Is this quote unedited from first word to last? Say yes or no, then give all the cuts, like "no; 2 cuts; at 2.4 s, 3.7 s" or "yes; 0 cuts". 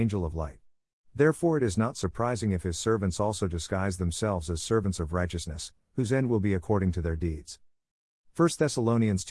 yes; 0 cuts